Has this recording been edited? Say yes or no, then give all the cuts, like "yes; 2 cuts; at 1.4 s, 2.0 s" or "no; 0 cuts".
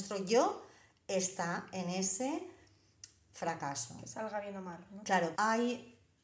yes; 1 cut; at 5.3 s